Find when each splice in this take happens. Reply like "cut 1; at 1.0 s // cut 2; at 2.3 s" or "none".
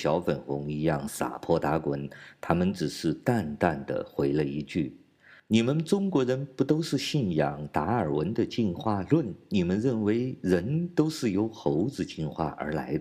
none

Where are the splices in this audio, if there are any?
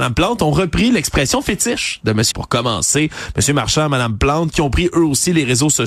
cut 1; at 2.3 s

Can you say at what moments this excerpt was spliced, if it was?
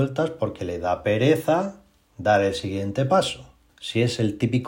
cut 1; at 3.7 s

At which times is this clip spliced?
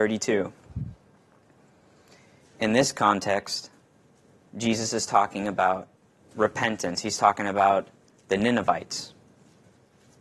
none

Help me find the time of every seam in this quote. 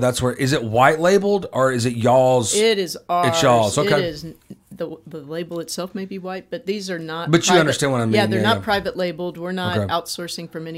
none

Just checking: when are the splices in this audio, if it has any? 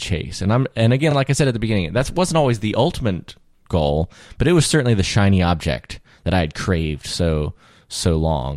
none

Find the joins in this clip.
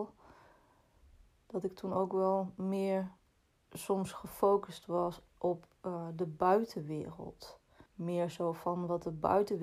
cut 1; at 7.9 s

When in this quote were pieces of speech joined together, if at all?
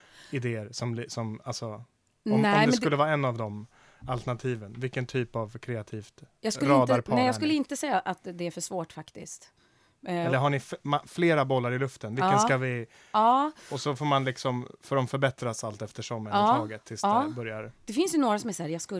none

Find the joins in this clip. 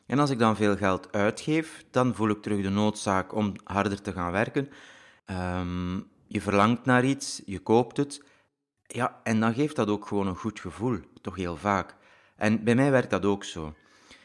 cut 1; at 5.2 s

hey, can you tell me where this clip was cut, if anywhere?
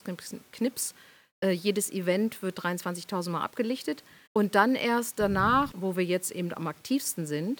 cut 1; at 4.3 s // cut 2; at 5.7 s

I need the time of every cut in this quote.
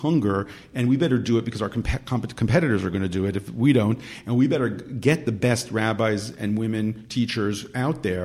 none

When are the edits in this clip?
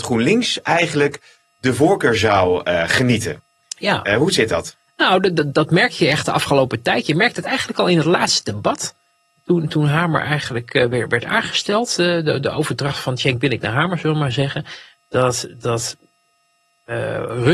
none

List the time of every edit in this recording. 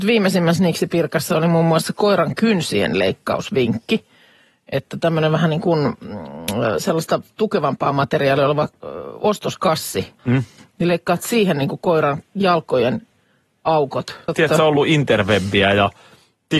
cut 1; at 10.2 s // cut 2; at 14.3 s

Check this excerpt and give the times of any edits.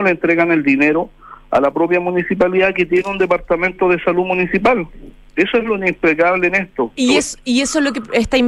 cut 1; at 7.0 s

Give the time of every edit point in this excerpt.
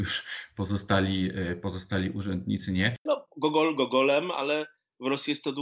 cut 1; at 3.1 s

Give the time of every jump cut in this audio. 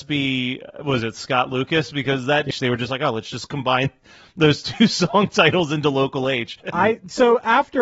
cut 1; at 2.5 s // cut 2; at 6.6 s

